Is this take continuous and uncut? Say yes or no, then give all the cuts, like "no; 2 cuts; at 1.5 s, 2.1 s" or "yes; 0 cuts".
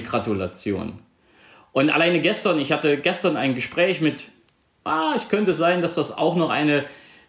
yes; 0 cuts